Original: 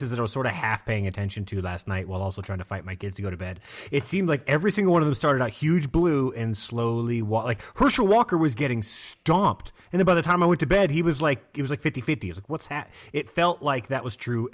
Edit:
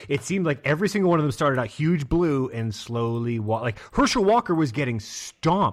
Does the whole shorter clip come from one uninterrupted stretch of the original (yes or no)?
yes